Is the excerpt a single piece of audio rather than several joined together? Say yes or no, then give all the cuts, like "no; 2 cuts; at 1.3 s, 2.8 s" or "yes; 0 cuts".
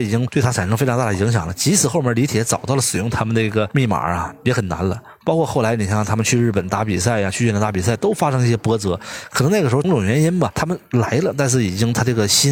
no; 1 cut; at 9.8 s